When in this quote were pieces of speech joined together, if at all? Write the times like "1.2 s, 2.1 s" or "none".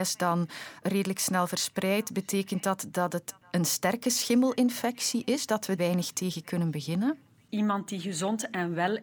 5.8 s, 7.5 s